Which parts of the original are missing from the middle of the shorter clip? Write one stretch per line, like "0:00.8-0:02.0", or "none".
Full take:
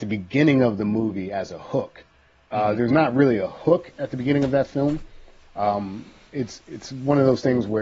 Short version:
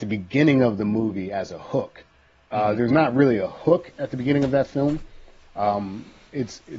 none